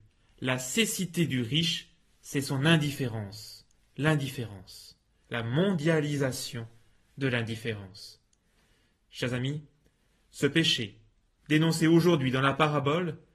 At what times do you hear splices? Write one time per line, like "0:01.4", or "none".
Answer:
0:05.2